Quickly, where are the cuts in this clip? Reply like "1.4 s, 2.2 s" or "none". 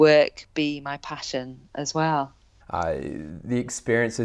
2.6 s

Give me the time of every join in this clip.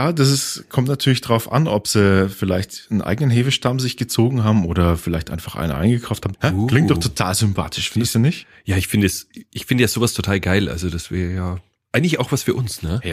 6.3 s

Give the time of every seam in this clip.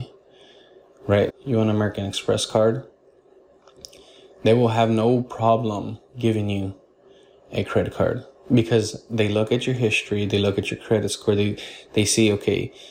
1.3 s

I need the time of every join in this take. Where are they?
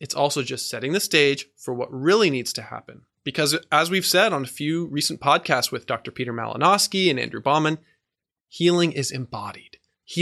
none

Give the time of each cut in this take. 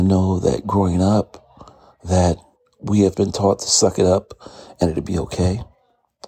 3.1 s

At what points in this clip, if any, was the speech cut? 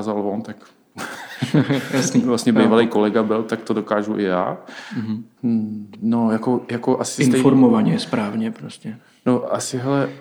5.4 s

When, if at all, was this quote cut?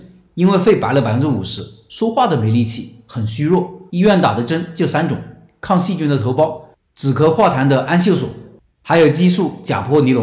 3.9 s

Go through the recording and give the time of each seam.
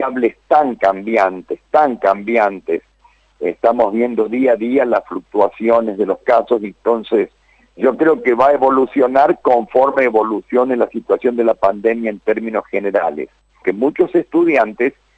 13.6 s

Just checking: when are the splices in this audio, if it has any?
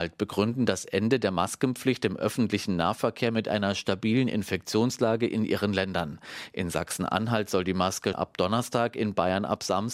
8.1 s

